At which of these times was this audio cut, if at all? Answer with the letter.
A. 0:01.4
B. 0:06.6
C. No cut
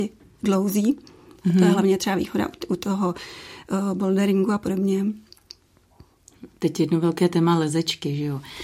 C